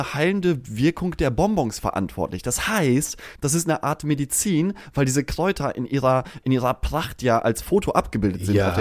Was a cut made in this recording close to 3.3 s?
yes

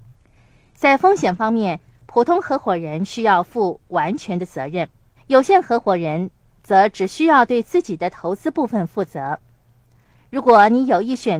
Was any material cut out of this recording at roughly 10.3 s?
no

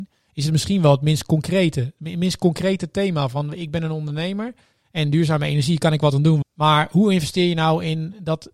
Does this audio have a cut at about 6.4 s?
yes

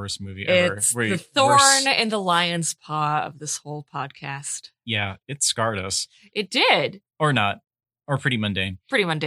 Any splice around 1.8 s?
no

